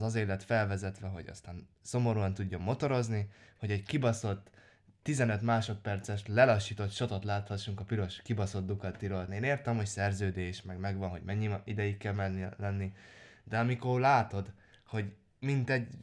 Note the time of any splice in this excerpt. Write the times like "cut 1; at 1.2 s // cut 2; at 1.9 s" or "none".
cut 1; at 9.3 s